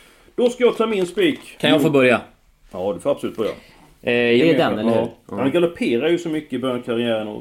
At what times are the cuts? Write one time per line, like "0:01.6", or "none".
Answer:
0:01.6
0:04.4

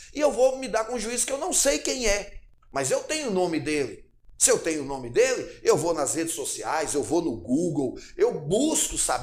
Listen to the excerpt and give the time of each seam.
none

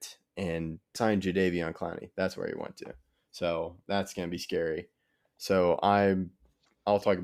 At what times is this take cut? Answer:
0:01.0

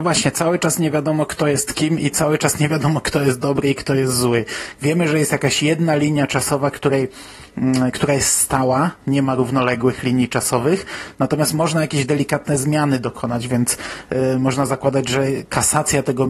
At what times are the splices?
0:04.7

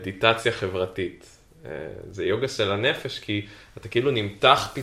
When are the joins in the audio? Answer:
none

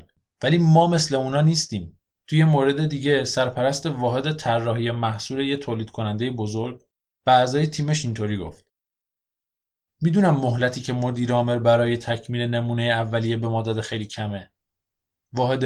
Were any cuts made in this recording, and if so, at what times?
0:02.1

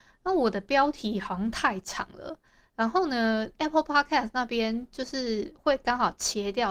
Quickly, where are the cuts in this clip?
none

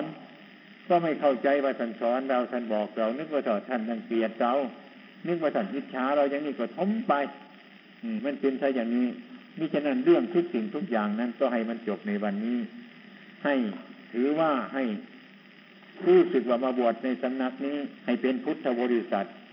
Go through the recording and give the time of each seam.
0:08.2
0:18.0

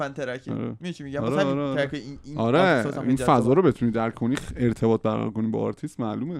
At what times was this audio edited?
none

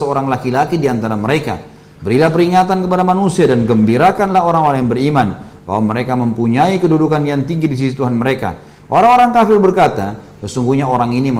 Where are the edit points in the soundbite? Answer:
none

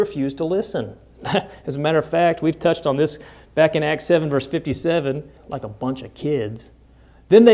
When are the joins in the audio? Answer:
0:05.4

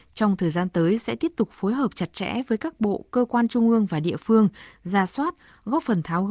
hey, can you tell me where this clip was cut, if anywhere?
none

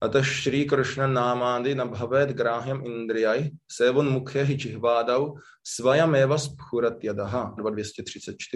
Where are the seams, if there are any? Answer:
0:07.6

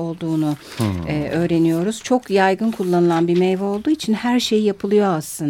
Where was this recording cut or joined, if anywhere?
none

